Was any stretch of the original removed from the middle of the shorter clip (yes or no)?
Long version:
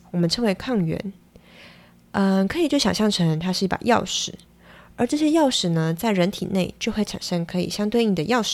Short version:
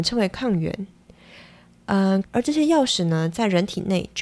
yes